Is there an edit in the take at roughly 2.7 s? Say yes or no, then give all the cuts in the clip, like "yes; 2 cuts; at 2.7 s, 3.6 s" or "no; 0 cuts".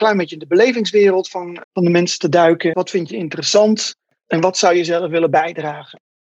yes; 2 cuts; at 1.6 s, 2.7 s